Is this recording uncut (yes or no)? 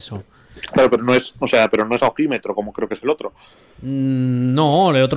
yes